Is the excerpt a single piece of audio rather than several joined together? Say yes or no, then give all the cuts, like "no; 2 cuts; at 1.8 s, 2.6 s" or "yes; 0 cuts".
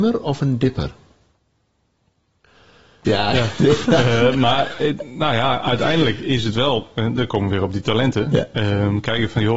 no; 2 cuts; at 3.0 s, 4.8 s